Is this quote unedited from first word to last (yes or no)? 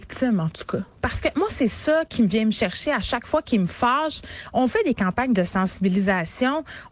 yes